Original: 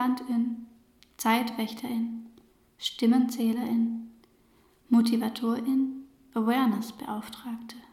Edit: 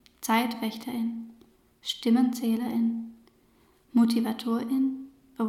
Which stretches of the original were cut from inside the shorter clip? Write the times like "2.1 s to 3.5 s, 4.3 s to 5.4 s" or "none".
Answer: none